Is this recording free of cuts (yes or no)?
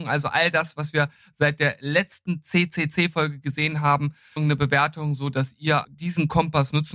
no